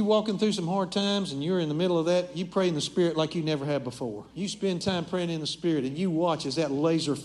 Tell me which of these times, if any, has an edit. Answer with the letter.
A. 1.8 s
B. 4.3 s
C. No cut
B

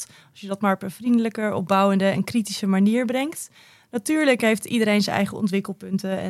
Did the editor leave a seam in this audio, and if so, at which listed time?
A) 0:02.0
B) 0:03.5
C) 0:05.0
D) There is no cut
D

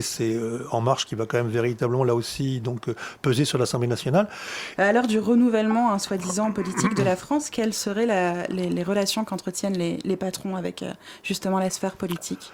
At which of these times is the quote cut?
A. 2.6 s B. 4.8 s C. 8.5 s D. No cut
B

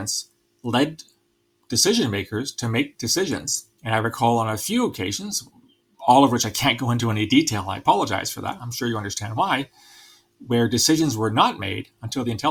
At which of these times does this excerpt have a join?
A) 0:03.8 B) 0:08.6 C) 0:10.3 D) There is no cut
D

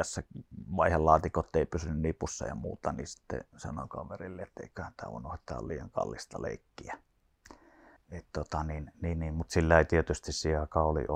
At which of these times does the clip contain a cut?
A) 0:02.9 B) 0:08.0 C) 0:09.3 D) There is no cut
B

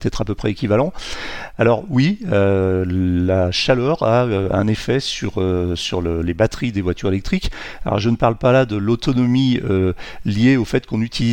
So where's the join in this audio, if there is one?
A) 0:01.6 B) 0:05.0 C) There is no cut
C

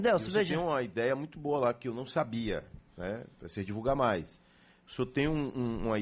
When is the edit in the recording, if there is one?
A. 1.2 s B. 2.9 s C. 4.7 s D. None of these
B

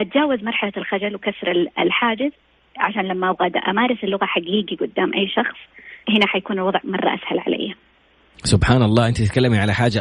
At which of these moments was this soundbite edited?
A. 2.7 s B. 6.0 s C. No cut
B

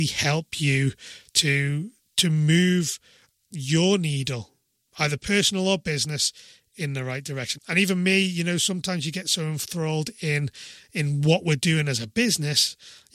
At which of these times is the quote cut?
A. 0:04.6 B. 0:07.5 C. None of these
B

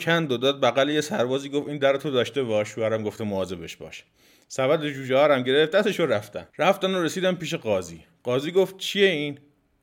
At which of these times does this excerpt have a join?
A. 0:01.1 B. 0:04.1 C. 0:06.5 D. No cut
C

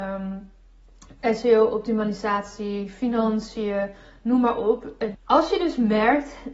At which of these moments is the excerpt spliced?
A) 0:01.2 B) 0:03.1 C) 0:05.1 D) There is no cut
C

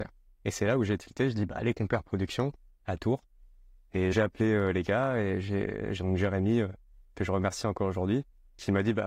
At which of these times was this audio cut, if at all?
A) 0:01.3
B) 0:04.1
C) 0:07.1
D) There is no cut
B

